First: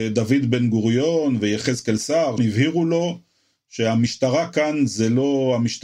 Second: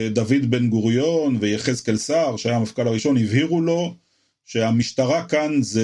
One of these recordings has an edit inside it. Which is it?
first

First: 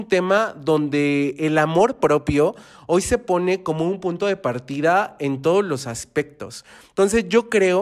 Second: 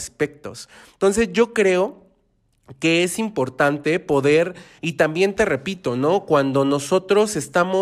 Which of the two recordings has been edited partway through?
second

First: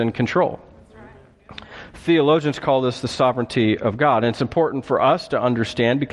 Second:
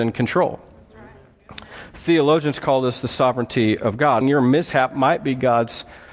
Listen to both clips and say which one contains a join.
second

